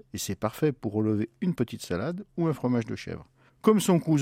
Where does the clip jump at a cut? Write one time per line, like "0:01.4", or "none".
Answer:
none